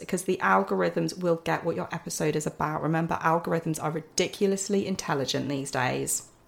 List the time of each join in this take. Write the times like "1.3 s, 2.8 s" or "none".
none